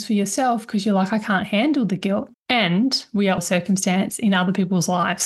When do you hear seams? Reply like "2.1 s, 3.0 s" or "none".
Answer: 2.3 s, 3.4 s